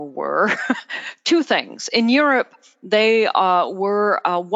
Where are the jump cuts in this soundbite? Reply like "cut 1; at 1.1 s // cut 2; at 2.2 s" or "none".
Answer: none